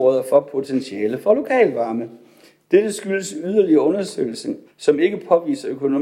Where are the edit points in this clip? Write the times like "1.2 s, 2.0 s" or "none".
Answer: 4.7 s